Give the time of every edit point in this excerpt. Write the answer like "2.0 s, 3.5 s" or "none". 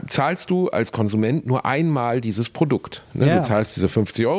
none